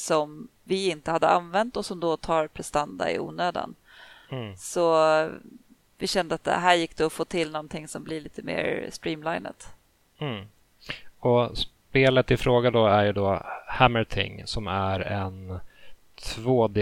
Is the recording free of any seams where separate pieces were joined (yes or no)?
yes